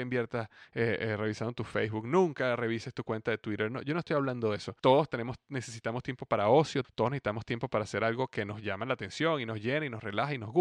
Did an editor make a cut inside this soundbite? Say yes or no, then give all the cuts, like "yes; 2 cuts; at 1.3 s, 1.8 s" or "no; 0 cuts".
yes; 2 cuts; at 4.8 s, 6.8 s